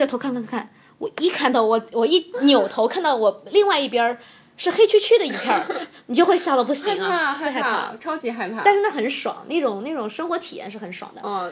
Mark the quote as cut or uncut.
uncut